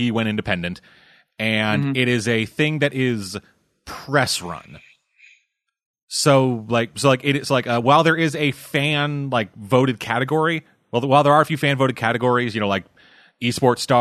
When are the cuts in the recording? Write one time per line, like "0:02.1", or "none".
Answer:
none